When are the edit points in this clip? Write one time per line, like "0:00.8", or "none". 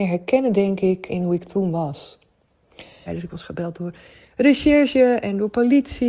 0:01.1
0:03.1